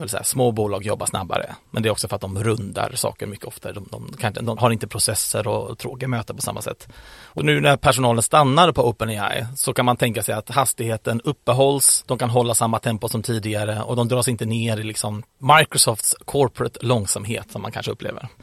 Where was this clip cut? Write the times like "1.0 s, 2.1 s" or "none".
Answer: 4.6 s, 15.3 s

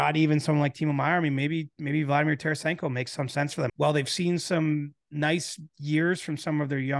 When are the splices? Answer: 3.7 s, 5.7 s

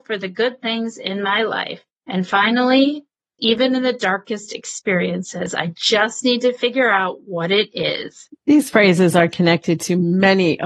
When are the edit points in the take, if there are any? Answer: 3.4 s, 8.3 s

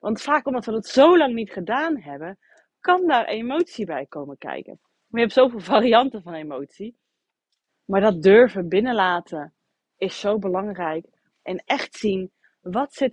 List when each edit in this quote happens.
7.7 s, 11.3 s

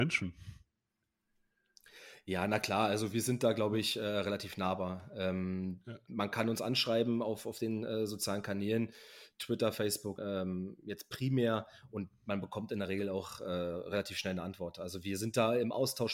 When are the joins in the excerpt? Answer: 10.2 s

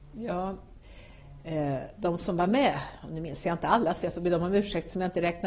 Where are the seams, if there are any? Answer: none

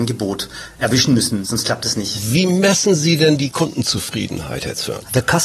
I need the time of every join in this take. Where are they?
1.4 s

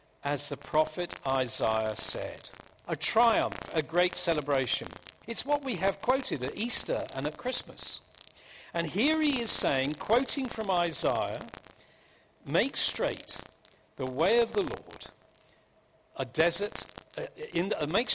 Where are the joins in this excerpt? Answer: 2.8 s, 5.2 s

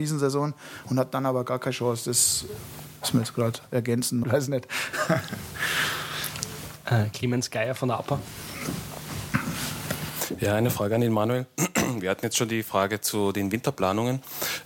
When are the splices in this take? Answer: 4.2 s

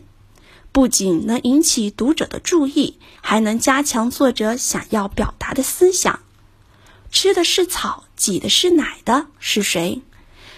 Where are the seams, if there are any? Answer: 3.1 s, 7.0 s

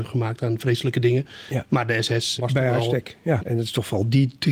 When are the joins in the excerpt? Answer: 2.4 s, 3.4 s

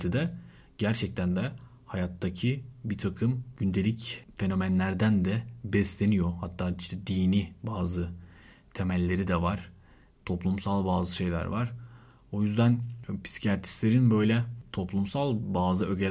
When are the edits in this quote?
none

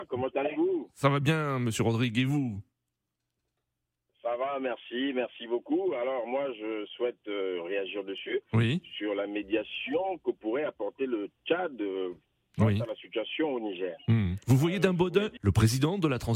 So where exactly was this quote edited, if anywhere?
15.4 s

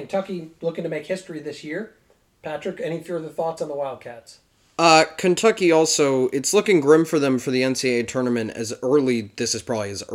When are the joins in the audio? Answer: none

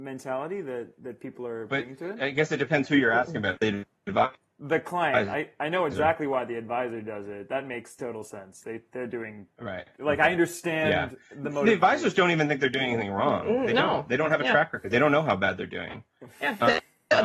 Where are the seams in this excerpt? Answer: 3.6 s

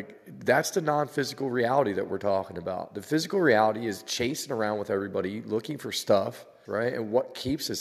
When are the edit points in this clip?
6.6 s

